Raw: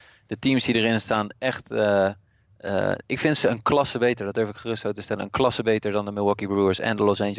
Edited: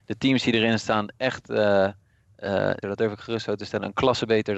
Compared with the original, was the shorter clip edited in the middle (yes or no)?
yes